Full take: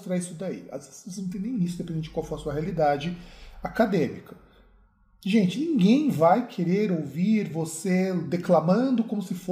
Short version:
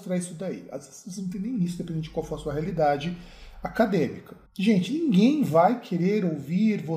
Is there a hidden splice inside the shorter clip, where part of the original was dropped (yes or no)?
yes